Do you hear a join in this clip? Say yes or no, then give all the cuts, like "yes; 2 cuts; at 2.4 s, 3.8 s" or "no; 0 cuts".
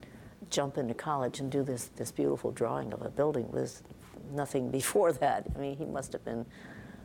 no; 0 cuts